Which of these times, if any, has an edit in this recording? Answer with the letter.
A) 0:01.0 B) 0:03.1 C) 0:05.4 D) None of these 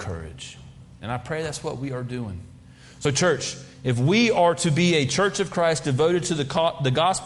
D